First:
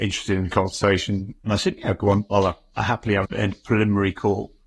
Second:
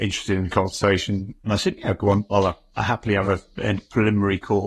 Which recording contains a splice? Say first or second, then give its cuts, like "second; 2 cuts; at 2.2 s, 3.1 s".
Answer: first; 1 cut; at 3.2 s